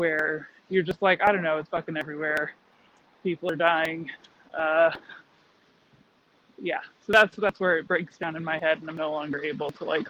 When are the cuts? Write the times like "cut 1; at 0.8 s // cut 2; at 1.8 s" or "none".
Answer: none